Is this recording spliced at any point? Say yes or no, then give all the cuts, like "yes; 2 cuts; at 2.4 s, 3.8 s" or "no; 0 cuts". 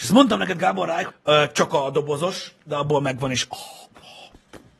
yes; 1 cut; at 1.1 s